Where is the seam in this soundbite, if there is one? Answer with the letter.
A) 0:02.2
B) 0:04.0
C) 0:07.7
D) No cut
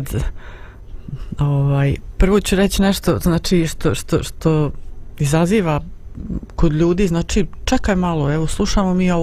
D